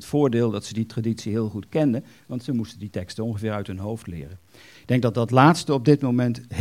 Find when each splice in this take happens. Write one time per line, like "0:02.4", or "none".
0:04.7